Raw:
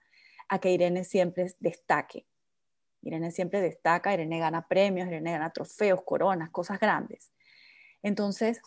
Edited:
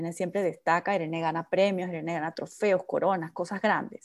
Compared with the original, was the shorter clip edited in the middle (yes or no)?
no